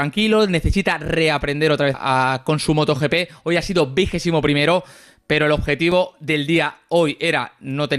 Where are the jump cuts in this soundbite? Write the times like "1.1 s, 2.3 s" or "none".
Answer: 1.9 s